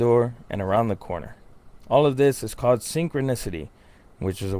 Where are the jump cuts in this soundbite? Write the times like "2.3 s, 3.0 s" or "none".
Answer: none